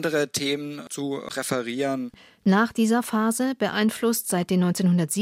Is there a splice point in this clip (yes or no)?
no